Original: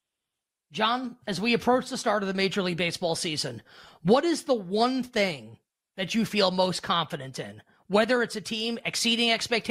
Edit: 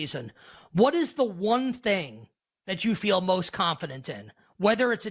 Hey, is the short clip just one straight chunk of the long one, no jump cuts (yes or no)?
yes